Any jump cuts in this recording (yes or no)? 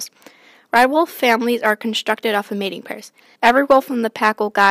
yes